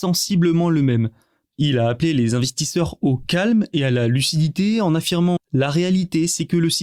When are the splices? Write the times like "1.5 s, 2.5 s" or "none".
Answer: 1.5 s, 5.4 s